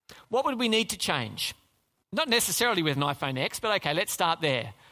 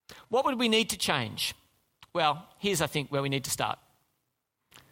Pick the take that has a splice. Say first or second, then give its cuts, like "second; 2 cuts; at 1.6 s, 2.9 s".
first; 1 cut; at 2.0 s